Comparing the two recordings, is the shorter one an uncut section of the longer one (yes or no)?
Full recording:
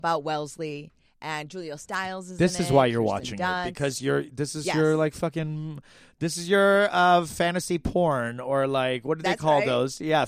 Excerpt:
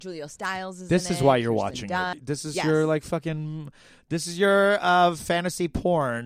no